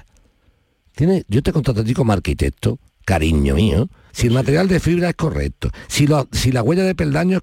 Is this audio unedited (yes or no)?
no